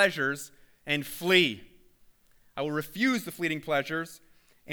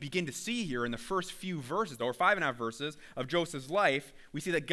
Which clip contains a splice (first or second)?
second